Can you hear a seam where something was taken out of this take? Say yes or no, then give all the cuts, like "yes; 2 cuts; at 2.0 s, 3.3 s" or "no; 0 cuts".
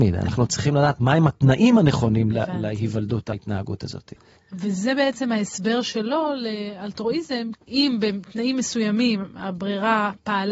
yes; 2 cuts; at 4.4 s, 7.5 s